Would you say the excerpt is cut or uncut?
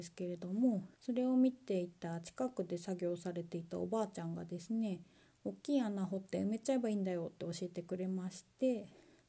cut